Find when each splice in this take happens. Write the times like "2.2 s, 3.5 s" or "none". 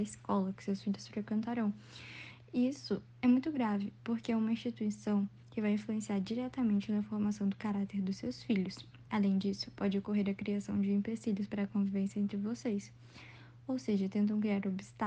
none